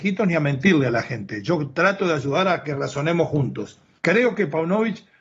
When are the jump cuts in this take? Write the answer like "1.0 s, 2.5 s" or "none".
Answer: 4.0 s